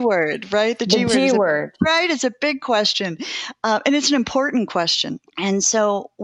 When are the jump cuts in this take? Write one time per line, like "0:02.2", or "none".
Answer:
0:05.3